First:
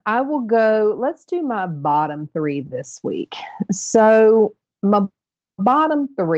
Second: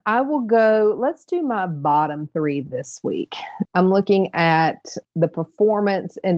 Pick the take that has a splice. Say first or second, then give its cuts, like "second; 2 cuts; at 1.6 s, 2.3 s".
second; 2 cuts; at 3.6 s, 5.0 s